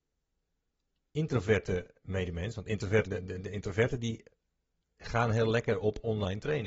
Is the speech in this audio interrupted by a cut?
yes; 1 cut; at 3.0 s

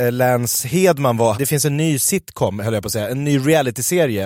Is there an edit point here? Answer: yes; 1 cut; at 1.3 s

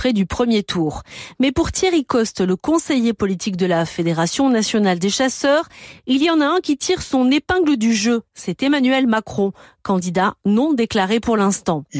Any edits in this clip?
no; 0 cuts

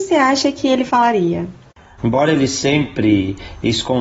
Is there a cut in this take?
yes; 1 cut; at 2.0 s

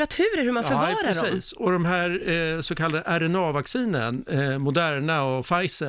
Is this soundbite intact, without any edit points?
yes; 0 cuts

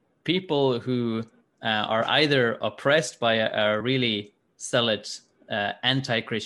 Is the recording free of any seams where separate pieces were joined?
yes; 0 cuts

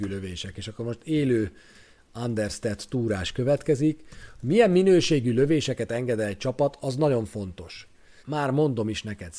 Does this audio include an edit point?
yes; 1 cut; at 8.2 s

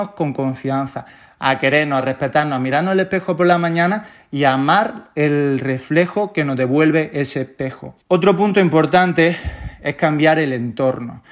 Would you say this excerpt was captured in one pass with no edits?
no; 1 cut; at 8.0 s

